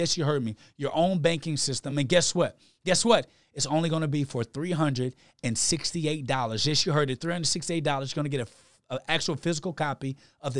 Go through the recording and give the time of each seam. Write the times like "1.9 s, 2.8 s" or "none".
none